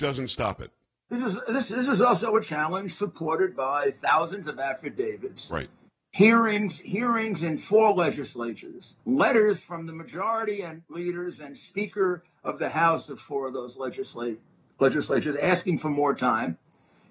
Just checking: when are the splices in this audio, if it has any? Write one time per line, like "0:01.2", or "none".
0:09.0